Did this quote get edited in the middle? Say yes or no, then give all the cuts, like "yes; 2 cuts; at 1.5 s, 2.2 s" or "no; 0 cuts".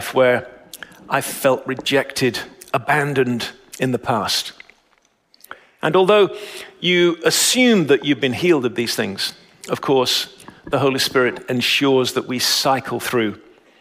no; 0 cuts